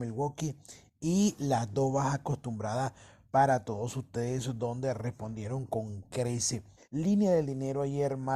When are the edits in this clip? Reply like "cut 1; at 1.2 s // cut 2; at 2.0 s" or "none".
cut 1; at 6.8 s